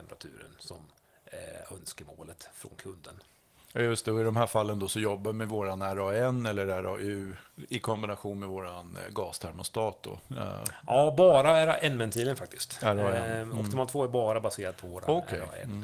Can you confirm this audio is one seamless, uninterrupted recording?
yes; 0 cuts

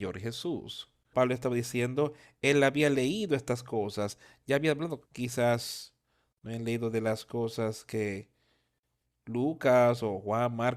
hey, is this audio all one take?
no; 2 cuts; at 1.1 s, 5.1 s

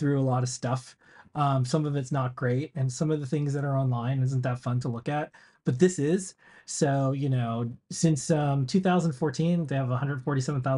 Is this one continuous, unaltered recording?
yes; 0 cuts

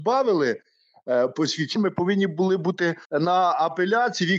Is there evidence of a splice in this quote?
yes; 2 cuts; at 1.8 s, 3.0 s

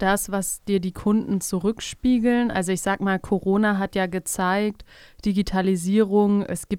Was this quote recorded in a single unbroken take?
yes; 0 cuts

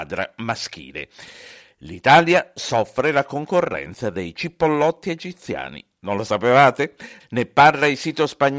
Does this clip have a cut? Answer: yes; 1 cut; at 7.2 s

